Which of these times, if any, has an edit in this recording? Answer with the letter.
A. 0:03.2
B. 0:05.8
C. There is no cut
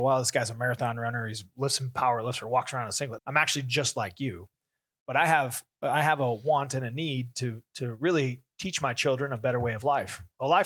A